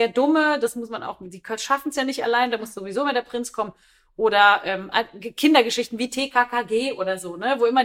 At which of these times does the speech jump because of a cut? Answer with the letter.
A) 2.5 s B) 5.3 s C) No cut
C